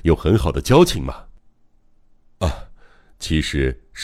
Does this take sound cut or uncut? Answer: uncut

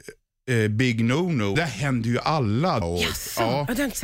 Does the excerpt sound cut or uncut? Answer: cut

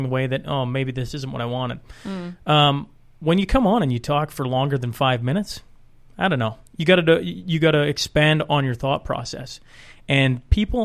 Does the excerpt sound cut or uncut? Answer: uncut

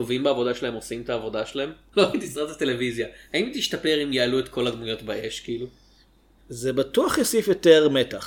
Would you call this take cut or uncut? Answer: cut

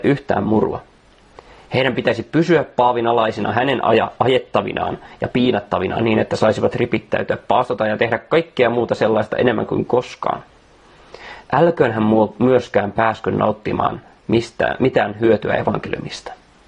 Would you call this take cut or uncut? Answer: cut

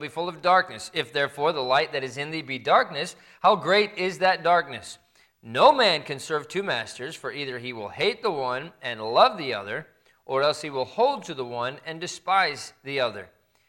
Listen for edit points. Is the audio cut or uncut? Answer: uncut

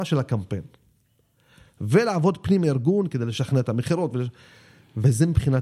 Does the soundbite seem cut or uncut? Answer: uncut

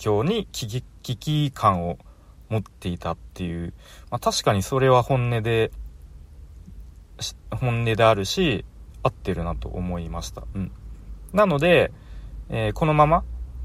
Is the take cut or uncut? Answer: uncut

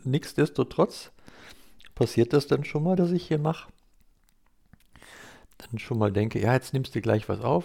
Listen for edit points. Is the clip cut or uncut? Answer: cut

